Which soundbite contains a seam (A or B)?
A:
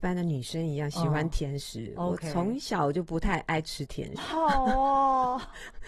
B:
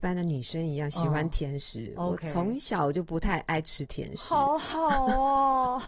A